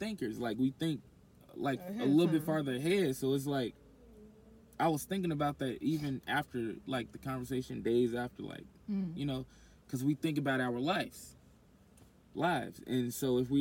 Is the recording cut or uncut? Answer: uncut